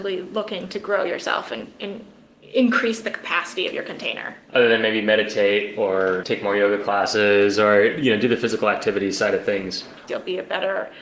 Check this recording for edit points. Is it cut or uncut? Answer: cut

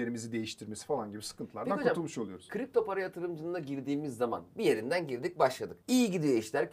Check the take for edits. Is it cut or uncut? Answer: cut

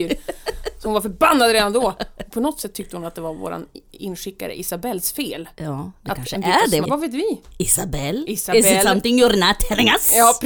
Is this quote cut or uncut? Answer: cut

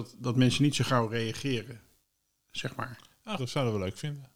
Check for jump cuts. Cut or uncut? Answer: cut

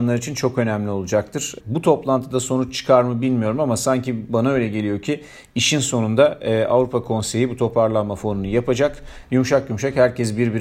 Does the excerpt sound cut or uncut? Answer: cut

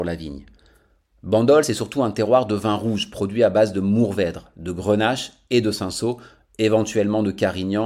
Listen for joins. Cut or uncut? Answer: uncut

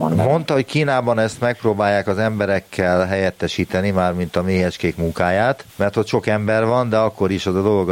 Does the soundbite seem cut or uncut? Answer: cut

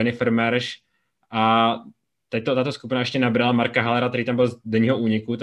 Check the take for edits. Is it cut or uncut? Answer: uncut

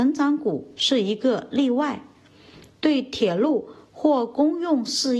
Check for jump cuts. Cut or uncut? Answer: cut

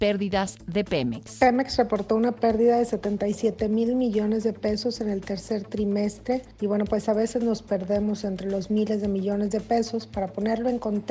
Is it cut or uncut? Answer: uncut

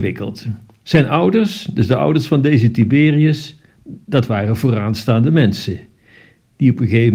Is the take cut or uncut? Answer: uncut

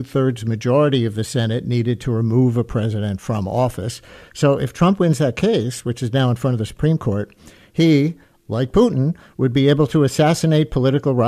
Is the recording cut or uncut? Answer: uncut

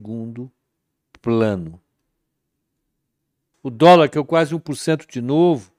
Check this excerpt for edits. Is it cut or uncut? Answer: cut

